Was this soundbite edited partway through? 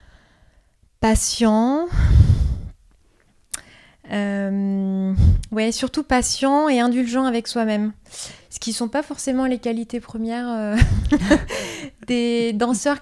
no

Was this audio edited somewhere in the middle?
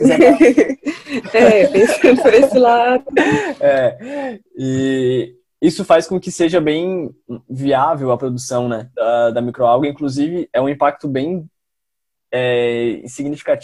yes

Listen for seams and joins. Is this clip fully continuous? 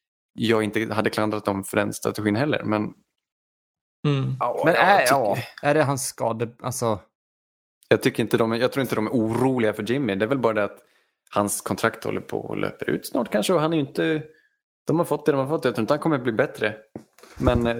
yes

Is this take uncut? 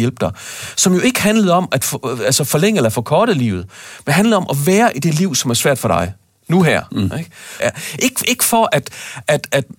no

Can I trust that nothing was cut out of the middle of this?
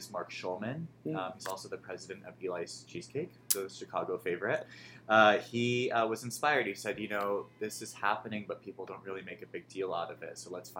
yes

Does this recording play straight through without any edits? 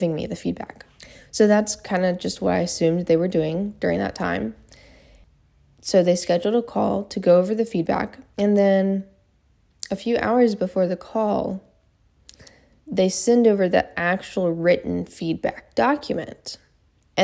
yes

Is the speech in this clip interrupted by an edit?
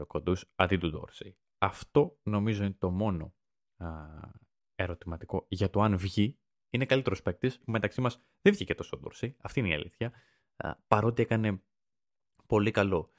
yes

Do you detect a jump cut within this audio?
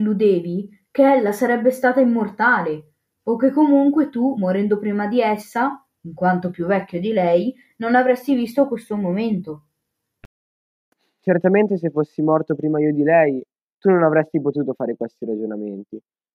no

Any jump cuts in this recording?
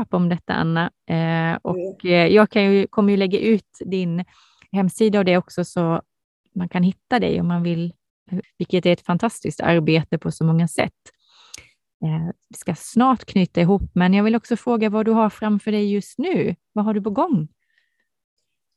yes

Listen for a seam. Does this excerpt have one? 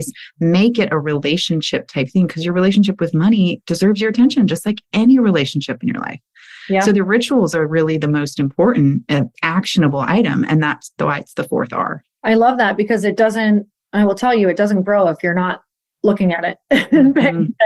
no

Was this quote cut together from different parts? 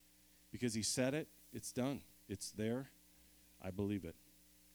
no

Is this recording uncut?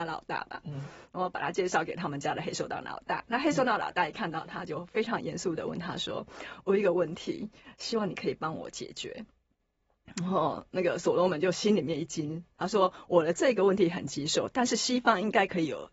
yes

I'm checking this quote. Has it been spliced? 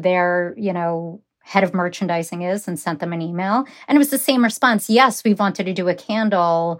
yes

